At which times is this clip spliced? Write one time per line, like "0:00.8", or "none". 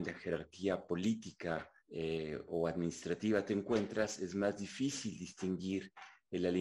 0:01.8